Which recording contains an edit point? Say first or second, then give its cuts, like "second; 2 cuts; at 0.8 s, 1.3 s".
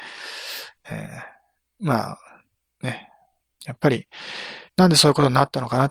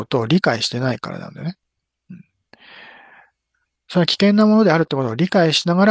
first; 2 cuts; at 3.6 s, 4.7 s